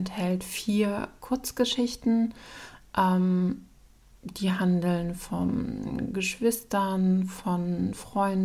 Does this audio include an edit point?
no; 0 cuts

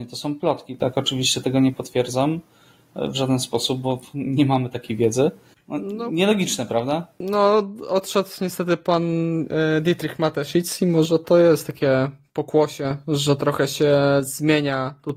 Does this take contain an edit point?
yes; 1 cut; at 5.5 s

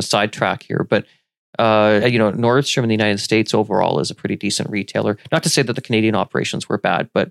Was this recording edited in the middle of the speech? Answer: yes; 1 cut; at 2.0 s

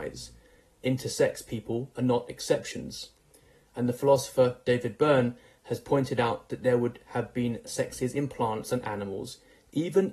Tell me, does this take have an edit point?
no; 0 cuts

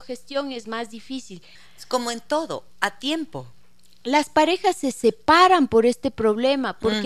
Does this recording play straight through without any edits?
no; 1 cut; at 1.6 s

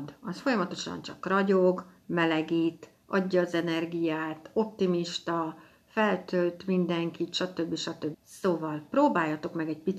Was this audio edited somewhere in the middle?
yes; 1 cut; at 8.1 s

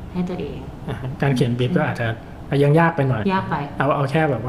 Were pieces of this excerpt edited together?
yes; 1 cut; at 3.2 s

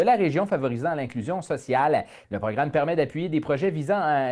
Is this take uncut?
no; 1 cut; at 2.2 s

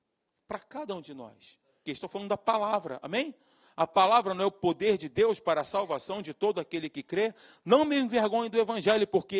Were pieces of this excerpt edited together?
yes; 1 cut; at 1.8 s

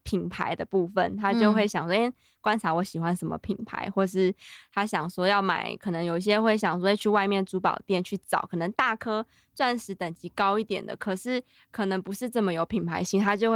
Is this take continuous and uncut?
yes; 0 cuts

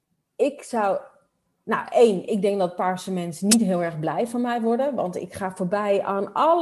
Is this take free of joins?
yes; 0 cuts

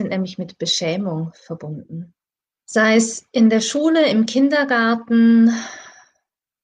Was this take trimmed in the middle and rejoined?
yes; 1 cut; at 2.5 s

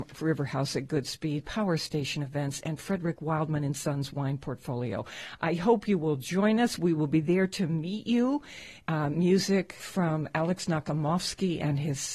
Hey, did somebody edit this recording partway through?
no; 0 cuts

